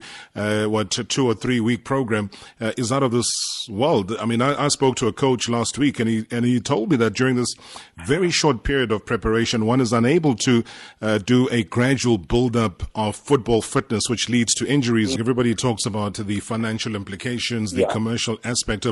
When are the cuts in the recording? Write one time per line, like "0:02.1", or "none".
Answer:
0:15.2